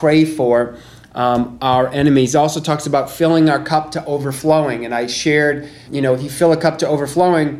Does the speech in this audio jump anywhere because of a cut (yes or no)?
yes